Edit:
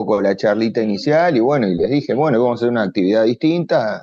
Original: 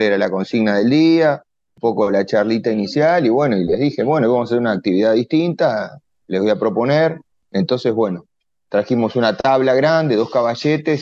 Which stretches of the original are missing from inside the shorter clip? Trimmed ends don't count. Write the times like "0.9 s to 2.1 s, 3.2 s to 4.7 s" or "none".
none